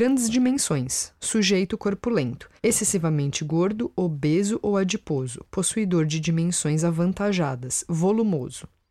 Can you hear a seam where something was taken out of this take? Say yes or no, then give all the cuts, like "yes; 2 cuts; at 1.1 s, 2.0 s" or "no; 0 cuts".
yes; 1 cut; at 2.6 s